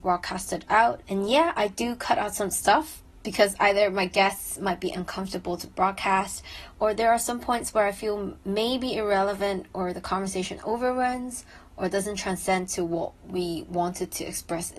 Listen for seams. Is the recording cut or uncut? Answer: cut